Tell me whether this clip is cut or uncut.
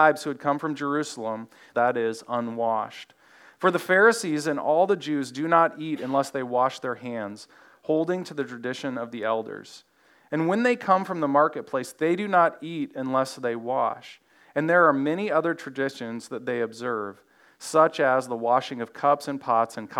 cut